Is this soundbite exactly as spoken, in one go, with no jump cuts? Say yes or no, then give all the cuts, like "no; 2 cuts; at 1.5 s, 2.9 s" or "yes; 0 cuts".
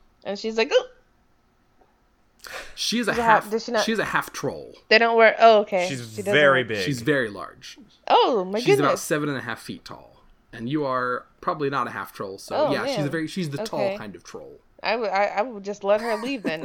yes; 0 cuts